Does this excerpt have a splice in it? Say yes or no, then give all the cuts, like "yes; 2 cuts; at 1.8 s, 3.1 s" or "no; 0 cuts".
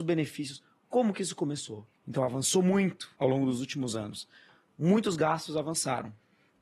yes; 2 cuts; at 1.9 s, 3.1 s